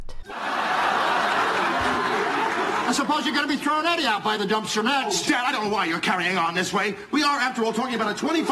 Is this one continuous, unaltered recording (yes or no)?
yes